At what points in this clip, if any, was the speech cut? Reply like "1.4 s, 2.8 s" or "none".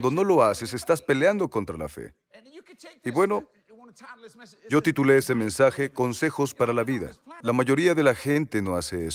7.4 s